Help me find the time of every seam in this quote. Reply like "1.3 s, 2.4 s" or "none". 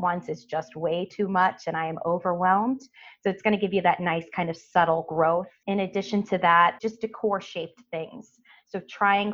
6.8 s